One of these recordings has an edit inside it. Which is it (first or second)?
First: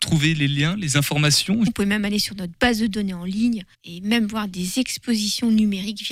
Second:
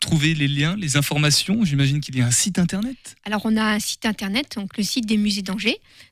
first